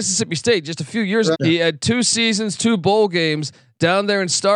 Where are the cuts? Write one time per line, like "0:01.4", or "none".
0:01.3